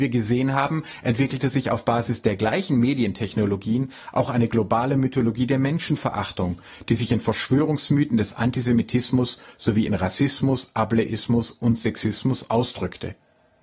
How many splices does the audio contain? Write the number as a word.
zero